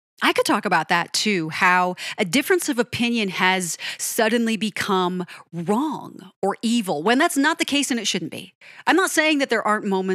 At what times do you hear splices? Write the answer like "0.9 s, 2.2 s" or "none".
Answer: none